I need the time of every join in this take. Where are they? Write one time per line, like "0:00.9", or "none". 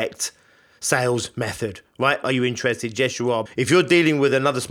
0:02.2
0:03.5